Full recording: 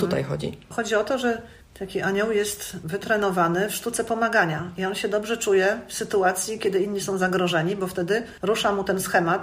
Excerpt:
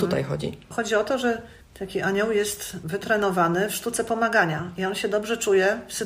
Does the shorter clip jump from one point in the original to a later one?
no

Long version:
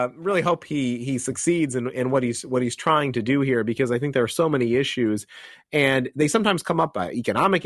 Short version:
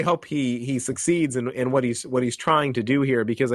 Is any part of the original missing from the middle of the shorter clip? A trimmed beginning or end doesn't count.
no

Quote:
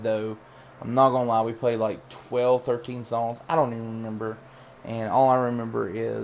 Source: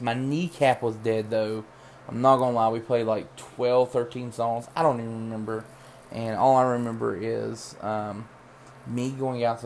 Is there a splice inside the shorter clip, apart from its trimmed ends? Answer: no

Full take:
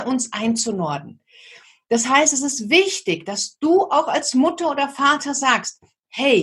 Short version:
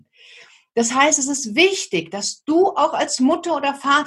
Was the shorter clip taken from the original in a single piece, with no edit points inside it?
yes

